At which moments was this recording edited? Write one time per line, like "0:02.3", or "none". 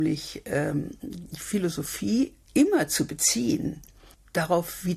0:02.4